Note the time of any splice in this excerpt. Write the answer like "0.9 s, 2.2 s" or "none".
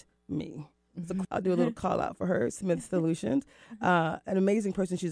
1.2 s